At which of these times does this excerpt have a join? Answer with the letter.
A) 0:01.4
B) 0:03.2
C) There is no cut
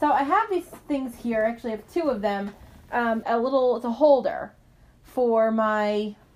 B